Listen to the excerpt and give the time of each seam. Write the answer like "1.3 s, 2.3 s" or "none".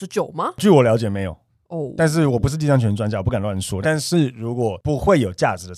3.8 s